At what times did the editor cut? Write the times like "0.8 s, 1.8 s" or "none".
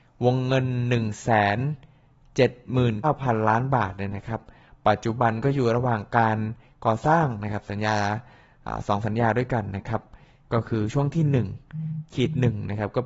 3.0 s